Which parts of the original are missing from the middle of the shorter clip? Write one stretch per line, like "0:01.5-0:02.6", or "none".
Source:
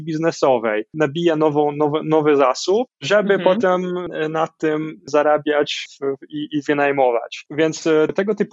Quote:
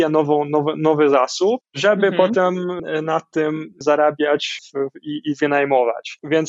none